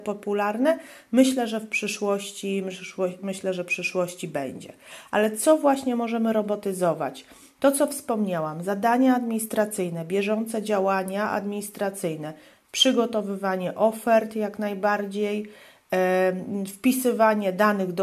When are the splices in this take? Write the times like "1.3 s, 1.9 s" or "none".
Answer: none